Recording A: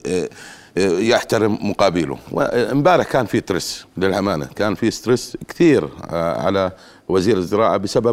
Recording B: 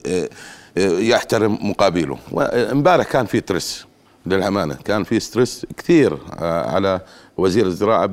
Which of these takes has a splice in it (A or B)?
A